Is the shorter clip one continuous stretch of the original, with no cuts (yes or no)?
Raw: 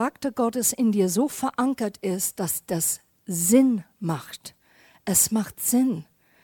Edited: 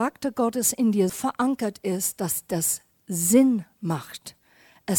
no